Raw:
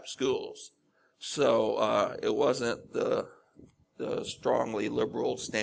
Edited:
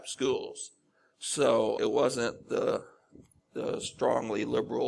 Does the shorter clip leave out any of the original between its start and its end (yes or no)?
yes